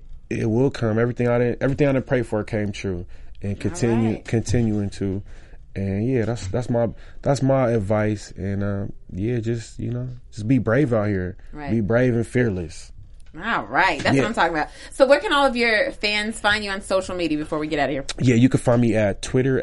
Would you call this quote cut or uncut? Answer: uncut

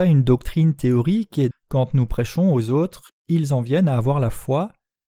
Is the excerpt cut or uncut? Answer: cut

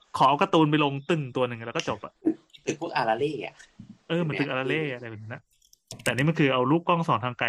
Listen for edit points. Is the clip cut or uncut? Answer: uncut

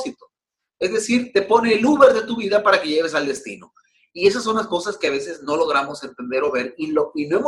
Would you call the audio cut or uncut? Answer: uncut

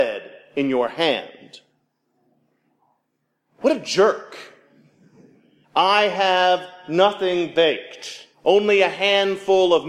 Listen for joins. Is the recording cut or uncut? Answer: cut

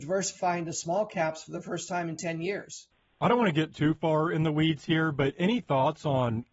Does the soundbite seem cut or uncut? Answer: uncut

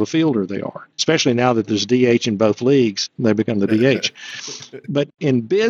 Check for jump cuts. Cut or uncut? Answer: cut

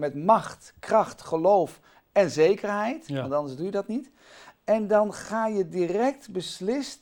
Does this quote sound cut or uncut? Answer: uncut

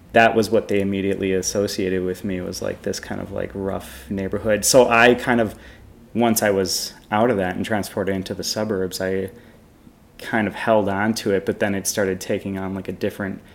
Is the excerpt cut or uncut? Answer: uncut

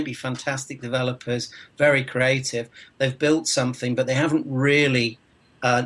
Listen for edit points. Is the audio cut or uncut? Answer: uncut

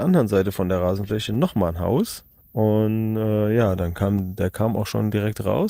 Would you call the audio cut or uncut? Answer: uncut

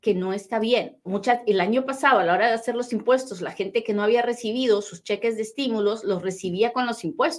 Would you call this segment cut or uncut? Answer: cut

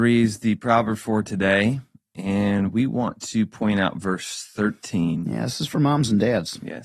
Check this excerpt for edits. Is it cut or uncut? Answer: uncut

